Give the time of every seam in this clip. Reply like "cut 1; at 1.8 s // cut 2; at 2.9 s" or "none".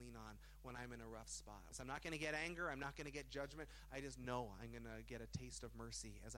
cut 1; at 1.7 s